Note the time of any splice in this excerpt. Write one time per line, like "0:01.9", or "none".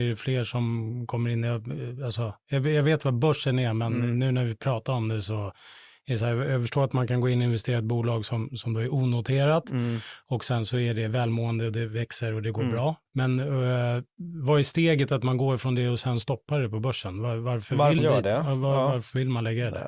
0:13.1
0:18.0